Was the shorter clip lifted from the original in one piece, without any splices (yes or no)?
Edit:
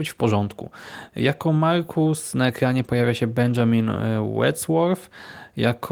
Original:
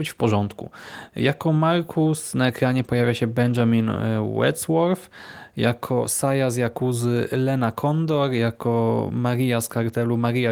yes